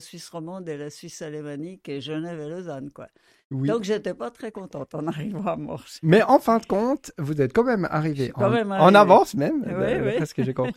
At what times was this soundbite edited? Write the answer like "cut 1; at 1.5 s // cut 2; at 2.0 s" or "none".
none